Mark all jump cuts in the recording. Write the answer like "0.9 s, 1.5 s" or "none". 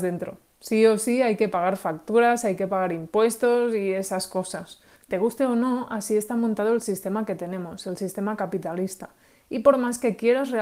4.9 s